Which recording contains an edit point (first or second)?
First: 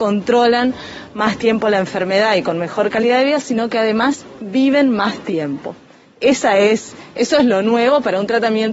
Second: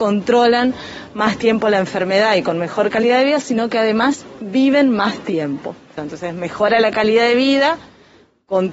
second